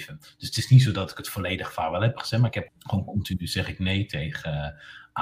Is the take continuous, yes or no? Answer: no